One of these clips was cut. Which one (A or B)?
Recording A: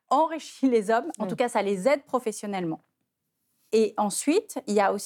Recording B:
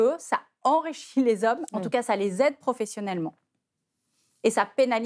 A